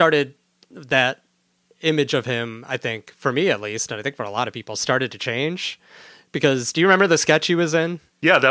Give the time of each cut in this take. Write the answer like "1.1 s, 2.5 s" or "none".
none